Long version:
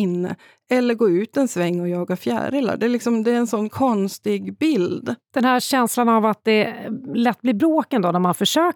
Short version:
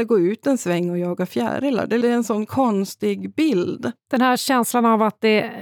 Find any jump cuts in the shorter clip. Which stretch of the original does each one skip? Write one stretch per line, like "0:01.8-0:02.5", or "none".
0:02.9-0:03.2